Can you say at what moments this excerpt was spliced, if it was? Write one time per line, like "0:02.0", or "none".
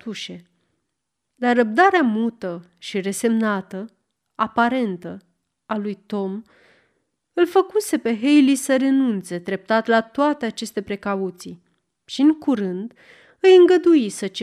none

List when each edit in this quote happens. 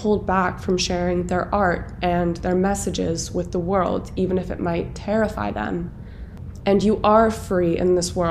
0:06.6

